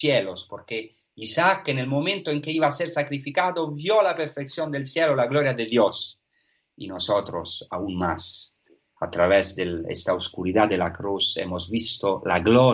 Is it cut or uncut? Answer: uncut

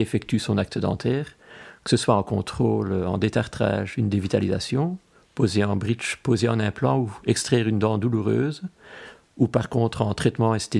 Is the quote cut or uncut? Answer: cut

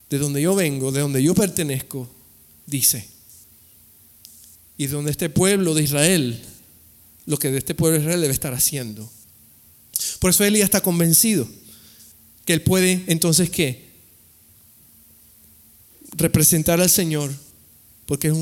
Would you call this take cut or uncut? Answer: uncut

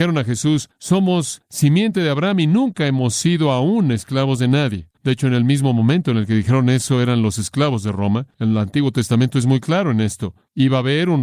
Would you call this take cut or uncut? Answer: cut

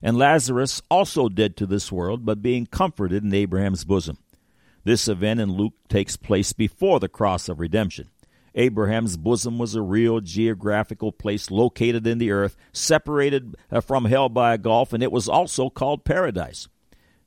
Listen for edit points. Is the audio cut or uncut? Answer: uncut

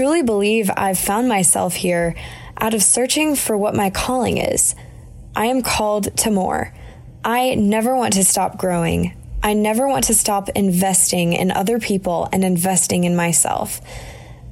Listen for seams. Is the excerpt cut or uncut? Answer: uncut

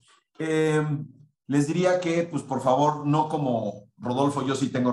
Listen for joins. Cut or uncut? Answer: uncut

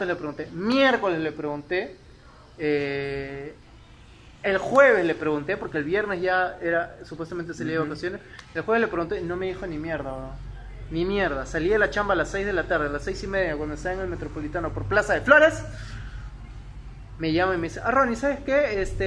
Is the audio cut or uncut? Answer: uncut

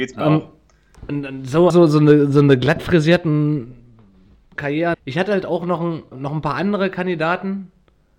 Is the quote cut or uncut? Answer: cut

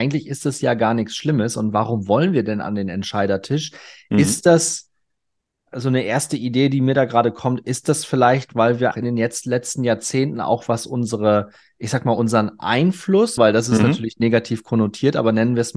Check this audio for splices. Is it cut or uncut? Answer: cut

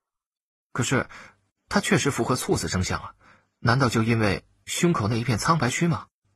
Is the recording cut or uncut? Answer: uncut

